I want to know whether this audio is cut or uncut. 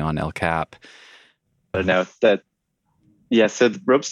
cut